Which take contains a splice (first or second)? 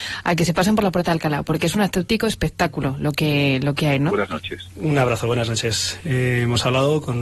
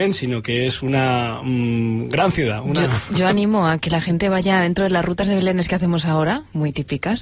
first